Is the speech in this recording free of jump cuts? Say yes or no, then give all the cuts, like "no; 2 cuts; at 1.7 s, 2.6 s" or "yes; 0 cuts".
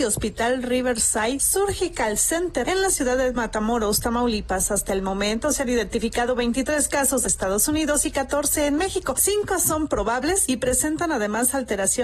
no; 2 cuts; at 7.2 s, 9.2 s